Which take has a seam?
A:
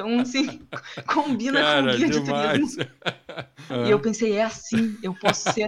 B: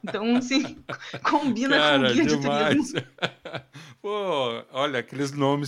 A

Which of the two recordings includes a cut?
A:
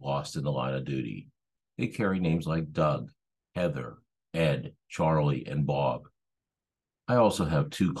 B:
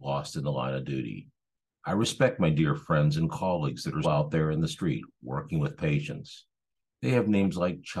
B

